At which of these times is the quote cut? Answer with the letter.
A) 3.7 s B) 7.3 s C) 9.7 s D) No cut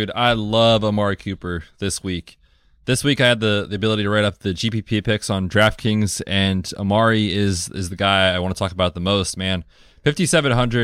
D